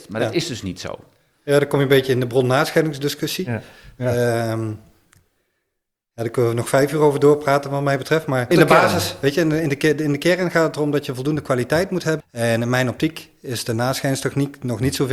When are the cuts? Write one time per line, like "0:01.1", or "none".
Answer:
0:08.5
0:12.2